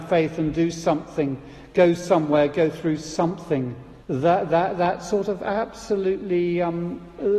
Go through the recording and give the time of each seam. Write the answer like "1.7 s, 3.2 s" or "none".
4.0 s